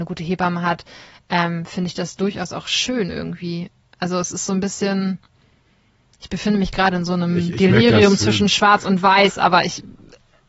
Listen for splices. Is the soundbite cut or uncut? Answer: uncut